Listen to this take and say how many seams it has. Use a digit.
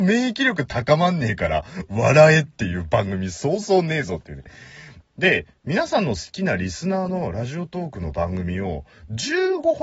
1